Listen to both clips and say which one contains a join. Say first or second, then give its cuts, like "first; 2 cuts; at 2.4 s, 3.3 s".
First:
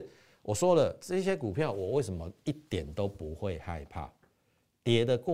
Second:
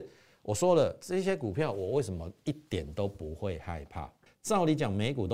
second; 1 cut; at 4.3 s